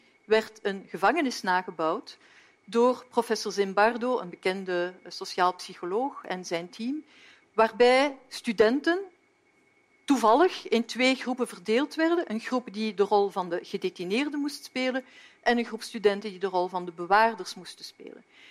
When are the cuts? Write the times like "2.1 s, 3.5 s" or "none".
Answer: none

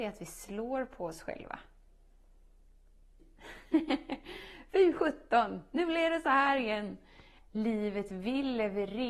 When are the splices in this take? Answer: 3.2 s, 7.4 s

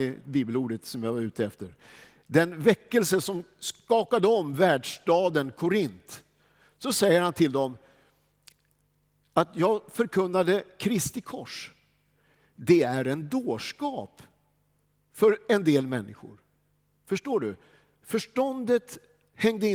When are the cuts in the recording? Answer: none

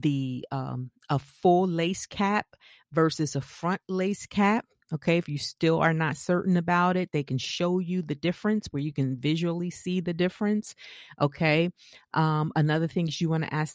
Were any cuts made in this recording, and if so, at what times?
none

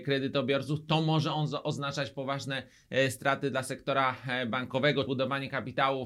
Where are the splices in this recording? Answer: 5.1 s

